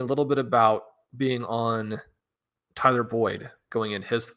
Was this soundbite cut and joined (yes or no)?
no